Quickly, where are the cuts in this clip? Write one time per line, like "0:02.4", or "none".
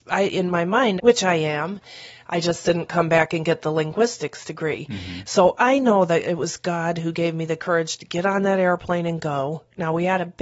0:01.0